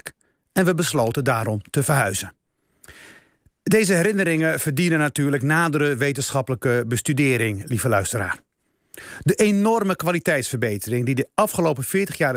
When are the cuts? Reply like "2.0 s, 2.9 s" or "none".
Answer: none